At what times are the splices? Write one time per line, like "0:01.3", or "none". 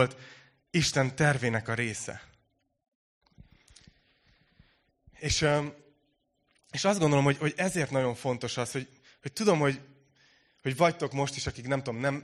none